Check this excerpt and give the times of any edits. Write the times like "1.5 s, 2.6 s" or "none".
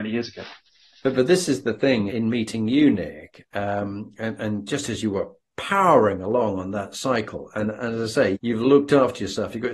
2.1 s, 8.3 s

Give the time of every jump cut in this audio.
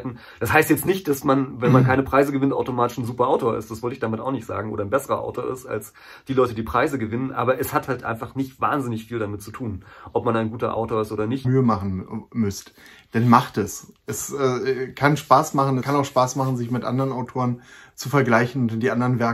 11.4 s, 15.8 s

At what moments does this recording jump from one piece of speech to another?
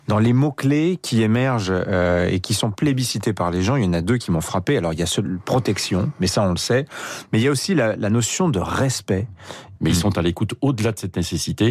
9.8 s

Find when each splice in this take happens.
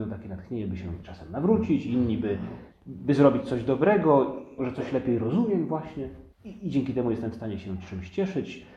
2.7 s, 4.6 s, 6.3 s

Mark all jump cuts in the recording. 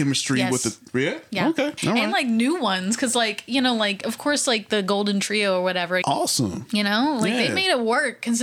1.8 s, 6.0 s

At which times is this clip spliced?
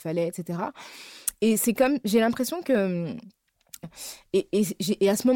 3.8 s

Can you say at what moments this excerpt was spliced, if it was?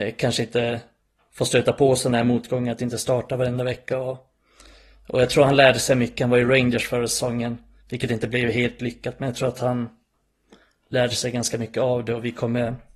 none

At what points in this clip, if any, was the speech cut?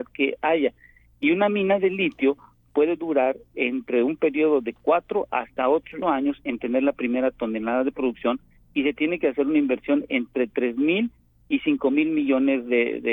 6.0 s

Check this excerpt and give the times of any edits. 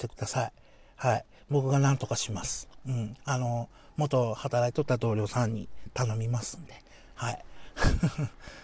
none

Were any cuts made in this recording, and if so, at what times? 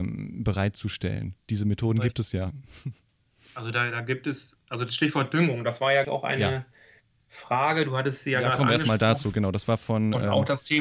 6.0 s

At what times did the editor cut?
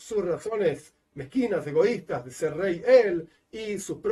none

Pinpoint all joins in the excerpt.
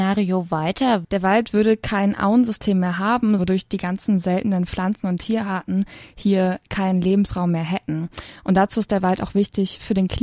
1.0 s, 3.4 s

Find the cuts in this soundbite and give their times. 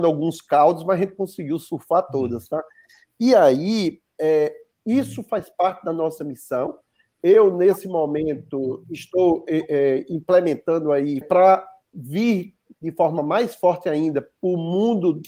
11.2 s

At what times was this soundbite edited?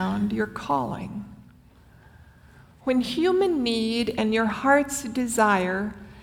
none

